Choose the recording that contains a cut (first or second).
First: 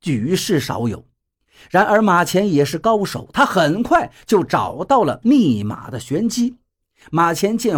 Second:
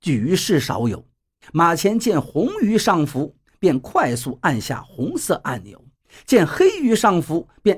second